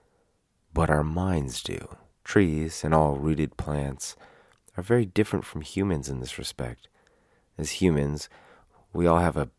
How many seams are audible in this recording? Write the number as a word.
one